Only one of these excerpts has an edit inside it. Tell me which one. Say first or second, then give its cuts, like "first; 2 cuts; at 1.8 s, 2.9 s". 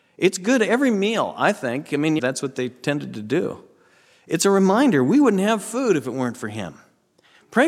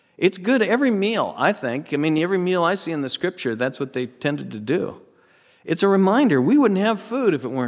first; 1 cut; at 2.2 s